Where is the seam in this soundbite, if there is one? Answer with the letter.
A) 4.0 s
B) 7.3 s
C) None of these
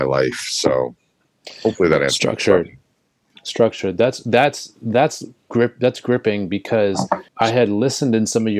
B